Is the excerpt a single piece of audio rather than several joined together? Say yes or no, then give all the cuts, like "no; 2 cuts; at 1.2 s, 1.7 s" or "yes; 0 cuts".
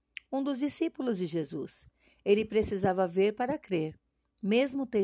yes; 0 cuts